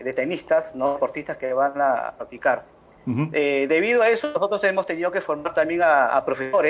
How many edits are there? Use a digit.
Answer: 0